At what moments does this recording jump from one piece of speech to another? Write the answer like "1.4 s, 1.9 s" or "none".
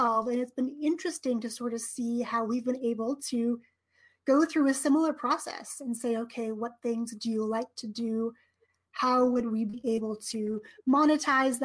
none